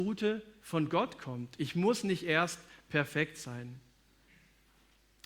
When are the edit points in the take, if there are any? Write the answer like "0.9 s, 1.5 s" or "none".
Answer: none